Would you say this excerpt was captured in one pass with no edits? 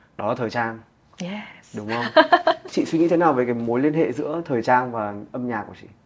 yes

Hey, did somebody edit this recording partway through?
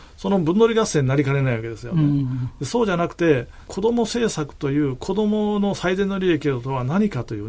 no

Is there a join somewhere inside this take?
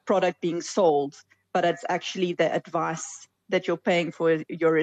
no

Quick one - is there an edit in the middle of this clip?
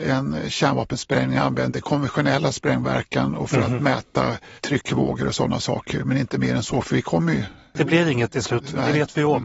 yes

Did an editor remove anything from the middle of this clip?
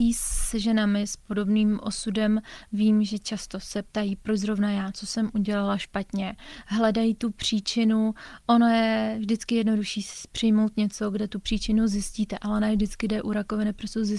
no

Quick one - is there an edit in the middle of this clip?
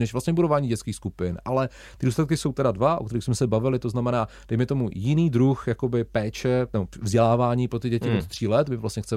no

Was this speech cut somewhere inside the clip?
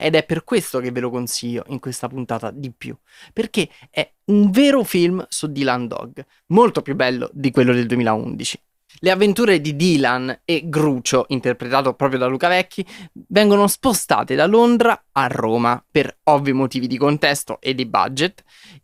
no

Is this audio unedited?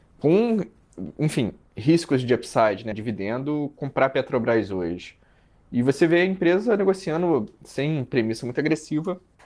no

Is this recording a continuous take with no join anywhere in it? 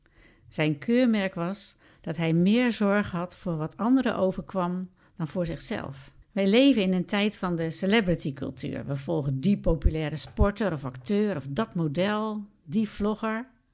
no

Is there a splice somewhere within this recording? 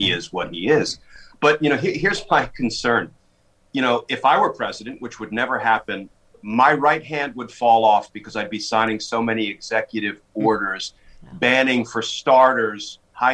no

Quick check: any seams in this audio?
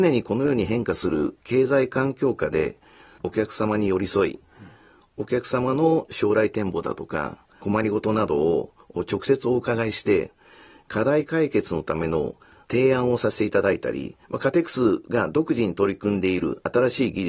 yes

